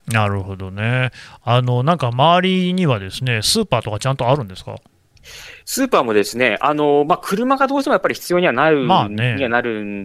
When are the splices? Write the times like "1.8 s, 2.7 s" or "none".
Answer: none